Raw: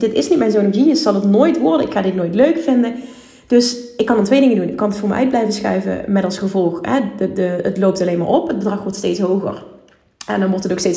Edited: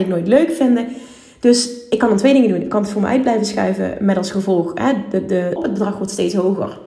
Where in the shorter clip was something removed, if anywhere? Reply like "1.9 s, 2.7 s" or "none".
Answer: 5.6 s